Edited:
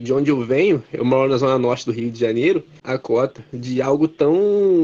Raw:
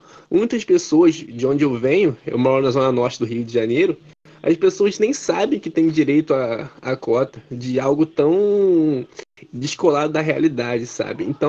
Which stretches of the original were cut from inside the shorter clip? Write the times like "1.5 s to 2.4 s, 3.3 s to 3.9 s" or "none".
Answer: 4.1 s to 6.8 s

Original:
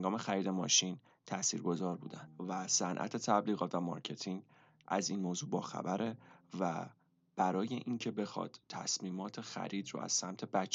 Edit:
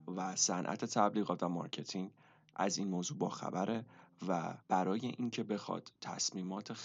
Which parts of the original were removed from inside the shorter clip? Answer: 6.9 s to 7.3 s

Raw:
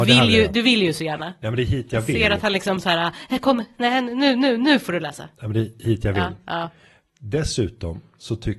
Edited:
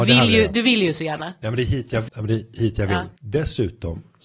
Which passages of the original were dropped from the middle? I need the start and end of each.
2.1 s to 5.3 s, 6.4 s to 7.2 s

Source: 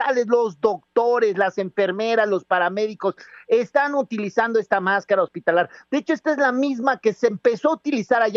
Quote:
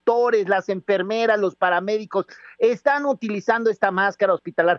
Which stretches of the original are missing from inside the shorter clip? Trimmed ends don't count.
none

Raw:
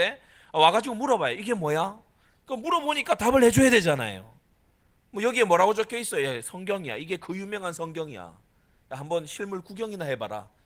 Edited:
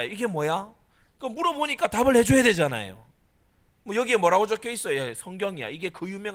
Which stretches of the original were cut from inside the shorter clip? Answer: none

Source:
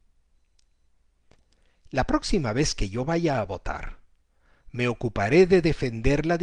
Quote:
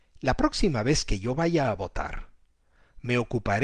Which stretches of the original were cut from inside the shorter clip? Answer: none

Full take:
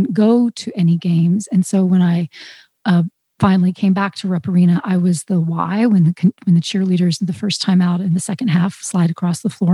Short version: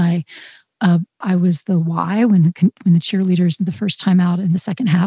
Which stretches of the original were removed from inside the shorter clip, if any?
3.2 s to 4.8 s

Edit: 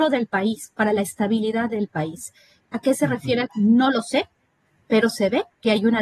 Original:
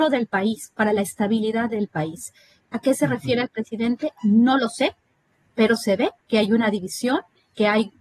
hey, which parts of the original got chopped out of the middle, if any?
3.5 s to 4.2 s

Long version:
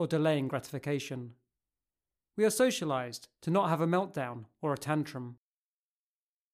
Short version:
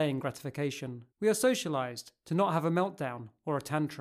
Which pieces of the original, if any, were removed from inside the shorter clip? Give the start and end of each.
1.4 s to 2.3 s

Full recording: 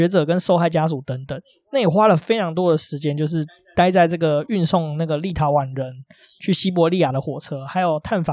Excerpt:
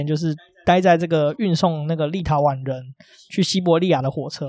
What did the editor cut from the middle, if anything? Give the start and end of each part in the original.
none

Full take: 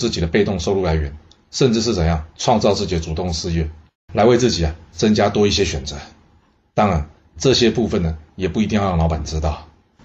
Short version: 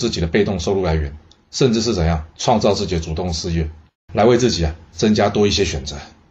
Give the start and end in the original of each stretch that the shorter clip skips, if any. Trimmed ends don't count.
none

